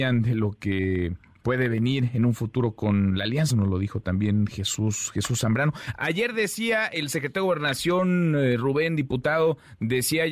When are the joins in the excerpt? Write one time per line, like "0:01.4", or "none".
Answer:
0:03.5
0:06.0